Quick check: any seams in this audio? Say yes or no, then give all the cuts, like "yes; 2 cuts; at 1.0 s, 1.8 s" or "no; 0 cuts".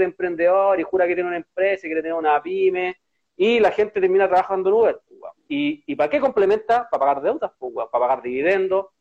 yes; 1 cut; at 5.4 s